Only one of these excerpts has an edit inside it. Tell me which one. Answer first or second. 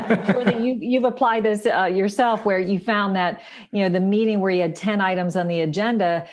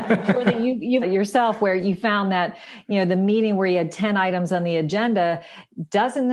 second